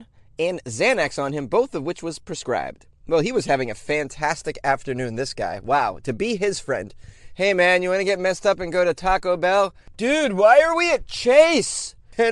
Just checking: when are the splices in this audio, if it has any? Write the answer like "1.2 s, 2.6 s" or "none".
none